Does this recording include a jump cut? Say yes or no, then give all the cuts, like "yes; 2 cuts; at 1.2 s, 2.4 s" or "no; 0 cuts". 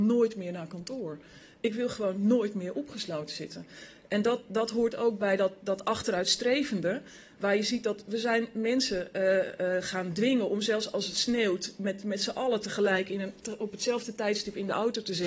no; 0 cuts